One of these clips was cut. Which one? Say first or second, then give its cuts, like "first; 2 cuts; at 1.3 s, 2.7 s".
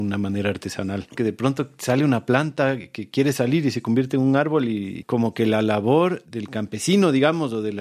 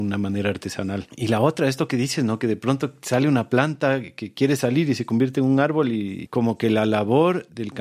first; 1 cut; at 1.2 s